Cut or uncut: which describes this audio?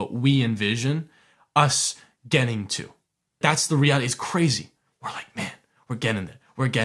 cut